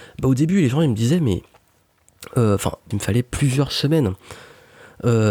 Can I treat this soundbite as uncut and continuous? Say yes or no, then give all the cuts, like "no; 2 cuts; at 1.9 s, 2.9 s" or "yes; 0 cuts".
no; 1 cut; at 2.9 s